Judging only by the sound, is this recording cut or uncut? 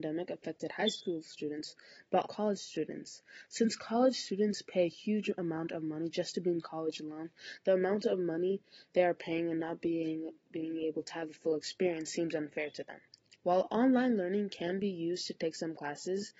cut